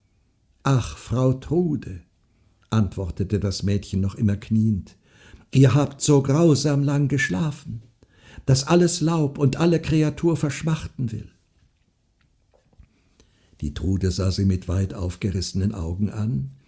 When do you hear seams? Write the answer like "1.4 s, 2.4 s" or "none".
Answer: none